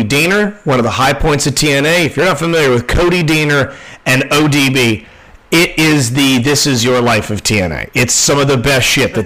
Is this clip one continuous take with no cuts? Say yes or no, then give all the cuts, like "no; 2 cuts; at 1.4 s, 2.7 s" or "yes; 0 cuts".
yes; 0 cuts